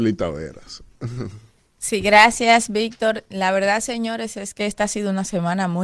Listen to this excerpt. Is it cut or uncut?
uncut